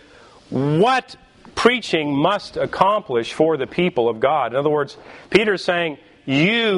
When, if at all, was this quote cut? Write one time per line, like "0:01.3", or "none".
none